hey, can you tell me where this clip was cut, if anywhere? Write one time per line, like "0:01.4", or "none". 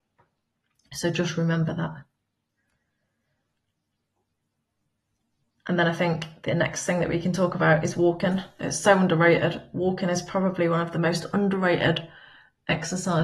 none